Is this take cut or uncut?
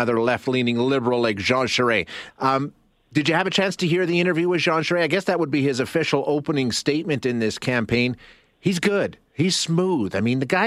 cut